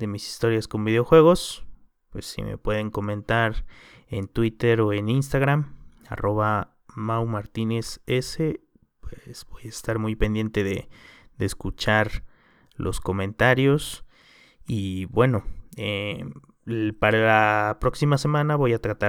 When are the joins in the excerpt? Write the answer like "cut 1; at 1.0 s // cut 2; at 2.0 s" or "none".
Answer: none